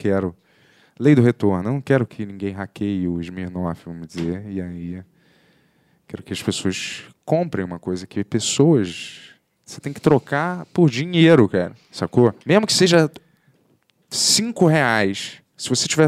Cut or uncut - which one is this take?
cut